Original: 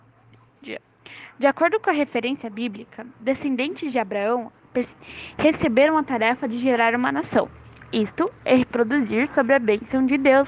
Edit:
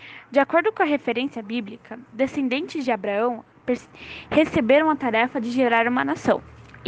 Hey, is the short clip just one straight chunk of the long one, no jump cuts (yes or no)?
yes